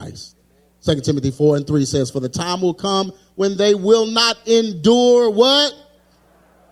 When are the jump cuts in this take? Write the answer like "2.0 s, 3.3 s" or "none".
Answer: none